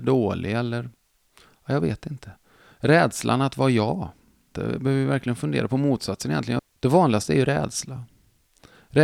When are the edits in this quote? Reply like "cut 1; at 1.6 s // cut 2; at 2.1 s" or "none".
cut 1; at 4.5 s // cut 2; at 6.6 s